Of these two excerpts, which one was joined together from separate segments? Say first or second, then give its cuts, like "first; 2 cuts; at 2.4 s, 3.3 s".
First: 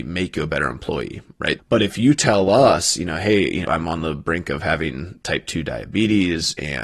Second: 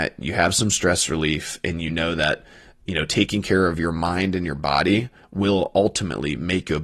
first; 2 cuts; at 1.6 s, 3.6 s